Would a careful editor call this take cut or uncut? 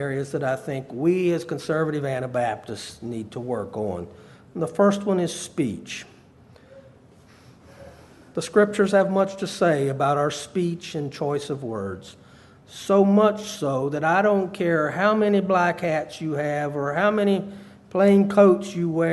uncut